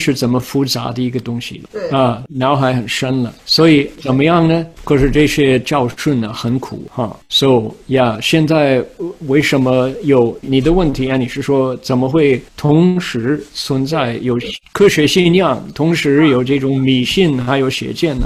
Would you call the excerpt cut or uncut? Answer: cut